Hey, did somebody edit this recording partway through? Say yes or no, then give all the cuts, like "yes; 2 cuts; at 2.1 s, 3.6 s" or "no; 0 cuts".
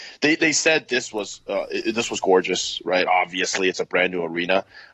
no; 0 cuts